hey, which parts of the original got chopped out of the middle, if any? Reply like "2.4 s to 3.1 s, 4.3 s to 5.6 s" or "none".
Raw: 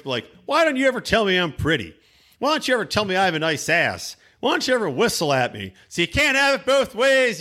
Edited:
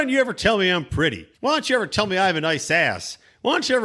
2.0 s to 2.3 s